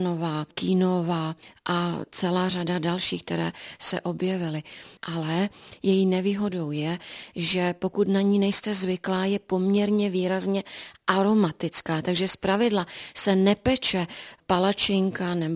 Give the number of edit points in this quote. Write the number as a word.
one